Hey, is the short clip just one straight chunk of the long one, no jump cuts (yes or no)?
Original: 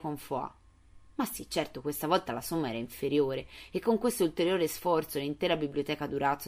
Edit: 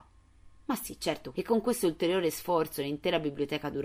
no